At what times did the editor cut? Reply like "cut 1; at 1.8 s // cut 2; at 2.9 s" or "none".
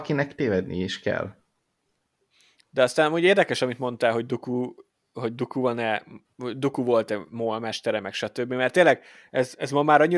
none